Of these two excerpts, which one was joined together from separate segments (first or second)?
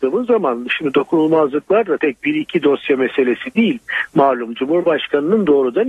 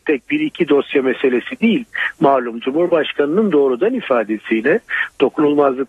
first